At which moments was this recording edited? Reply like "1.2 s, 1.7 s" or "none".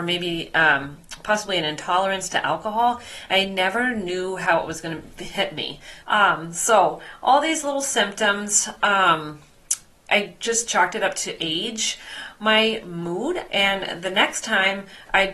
6.0 s, 13.5 s